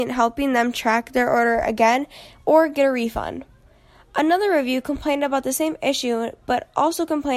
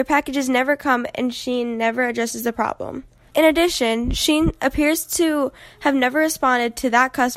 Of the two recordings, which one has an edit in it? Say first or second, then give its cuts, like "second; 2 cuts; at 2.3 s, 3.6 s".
second; 1 cut; at 3.3 s